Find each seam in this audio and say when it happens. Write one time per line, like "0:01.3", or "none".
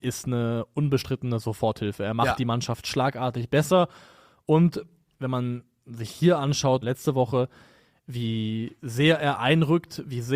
0:06.8